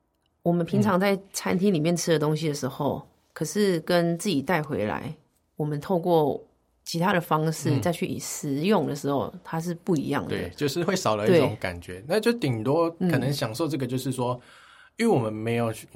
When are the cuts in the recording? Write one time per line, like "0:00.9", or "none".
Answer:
none

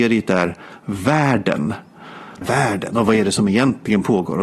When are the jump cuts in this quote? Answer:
0:02.4

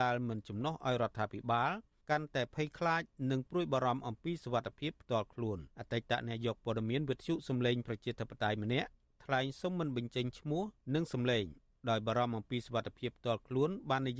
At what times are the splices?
0:05.7

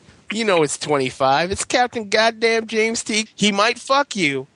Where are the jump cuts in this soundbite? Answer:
0:03.3

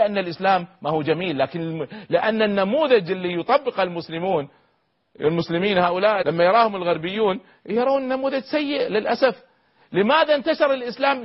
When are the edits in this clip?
0:06.2

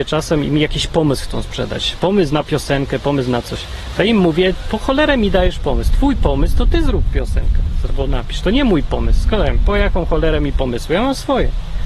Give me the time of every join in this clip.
none

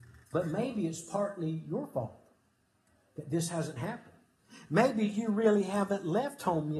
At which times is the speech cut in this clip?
none

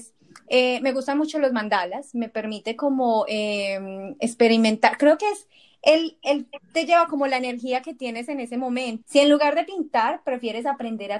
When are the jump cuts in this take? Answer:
0:09.0

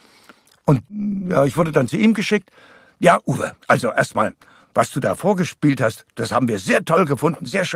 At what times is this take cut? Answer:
none

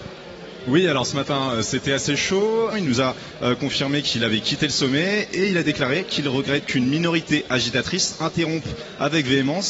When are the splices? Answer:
0:02.7

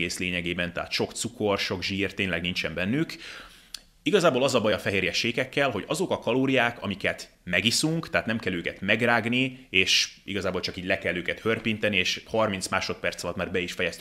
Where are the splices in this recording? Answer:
none

